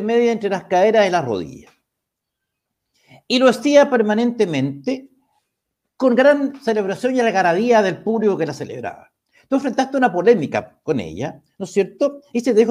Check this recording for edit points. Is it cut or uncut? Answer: uncut